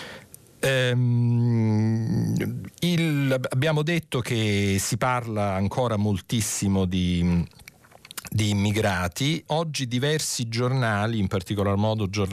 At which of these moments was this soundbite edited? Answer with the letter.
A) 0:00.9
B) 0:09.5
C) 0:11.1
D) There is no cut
B